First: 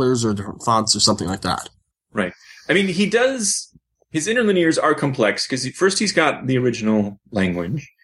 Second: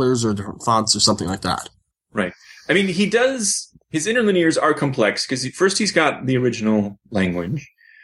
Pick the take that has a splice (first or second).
second